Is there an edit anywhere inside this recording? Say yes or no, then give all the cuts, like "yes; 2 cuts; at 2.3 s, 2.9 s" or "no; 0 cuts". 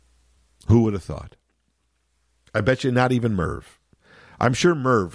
no; 0 cuts